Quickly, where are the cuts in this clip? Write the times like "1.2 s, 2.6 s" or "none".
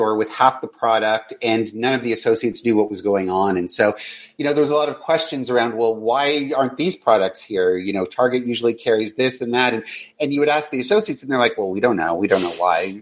none